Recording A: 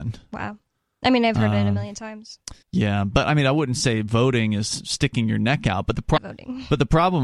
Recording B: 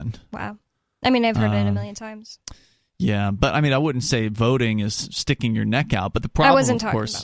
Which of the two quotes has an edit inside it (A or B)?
A